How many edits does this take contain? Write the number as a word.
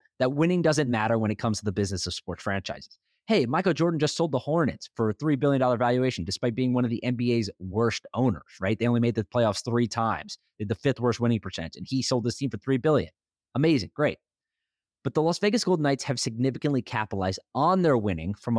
zero